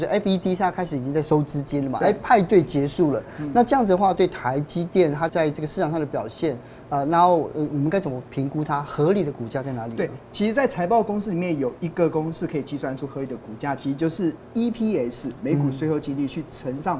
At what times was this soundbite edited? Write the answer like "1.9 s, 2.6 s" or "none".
5.3 s